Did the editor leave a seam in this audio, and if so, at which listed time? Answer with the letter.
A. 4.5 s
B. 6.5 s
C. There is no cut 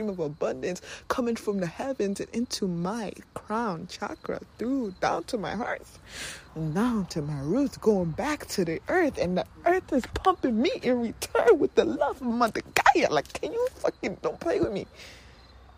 B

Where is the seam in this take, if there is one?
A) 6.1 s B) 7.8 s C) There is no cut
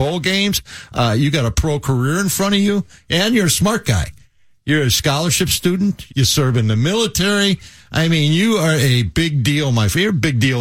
A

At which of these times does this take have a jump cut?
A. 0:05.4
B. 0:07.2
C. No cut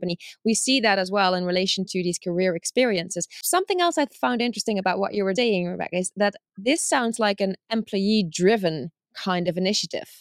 A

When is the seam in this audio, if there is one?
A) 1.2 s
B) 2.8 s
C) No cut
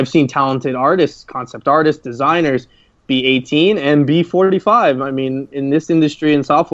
C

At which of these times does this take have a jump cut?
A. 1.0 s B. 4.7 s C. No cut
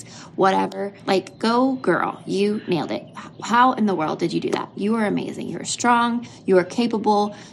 A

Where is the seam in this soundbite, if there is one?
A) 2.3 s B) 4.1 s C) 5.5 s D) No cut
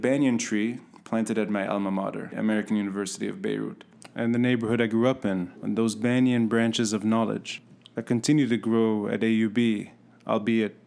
C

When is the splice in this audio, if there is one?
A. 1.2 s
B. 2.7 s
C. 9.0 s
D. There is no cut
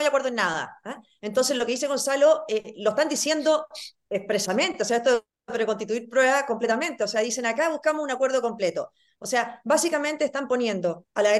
D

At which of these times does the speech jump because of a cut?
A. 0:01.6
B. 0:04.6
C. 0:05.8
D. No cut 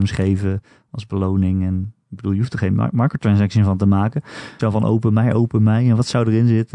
B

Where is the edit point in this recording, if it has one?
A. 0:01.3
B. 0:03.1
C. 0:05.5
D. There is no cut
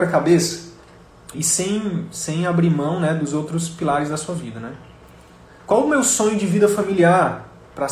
A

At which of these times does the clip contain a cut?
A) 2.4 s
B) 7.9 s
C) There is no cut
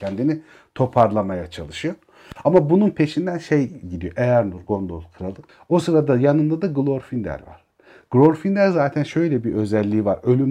C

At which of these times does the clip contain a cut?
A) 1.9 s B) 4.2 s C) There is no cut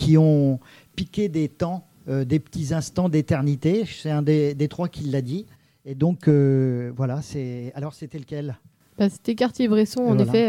C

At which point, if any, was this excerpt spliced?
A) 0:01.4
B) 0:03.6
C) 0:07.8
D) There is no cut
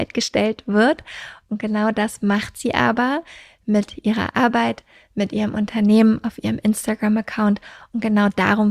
D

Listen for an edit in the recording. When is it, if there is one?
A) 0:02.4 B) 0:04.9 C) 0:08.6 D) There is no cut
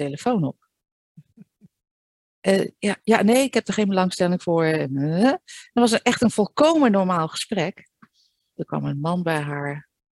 C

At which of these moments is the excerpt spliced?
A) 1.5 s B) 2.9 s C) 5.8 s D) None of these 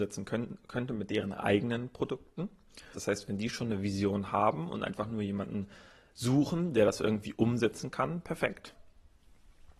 B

